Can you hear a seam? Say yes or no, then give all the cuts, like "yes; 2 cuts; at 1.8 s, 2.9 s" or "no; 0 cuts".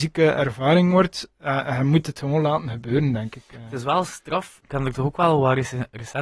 yes; 1 cut; at 4.6 s